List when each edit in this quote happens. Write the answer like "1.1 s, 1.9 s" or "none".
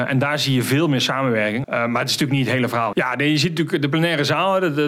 1.6 s, 2.9 s